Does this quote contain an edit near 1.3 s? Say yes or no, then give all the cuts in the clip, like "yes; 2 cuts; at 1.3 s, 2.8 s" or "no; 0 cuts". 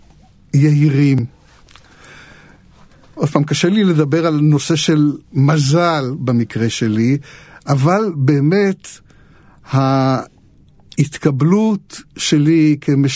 no; 0 cuts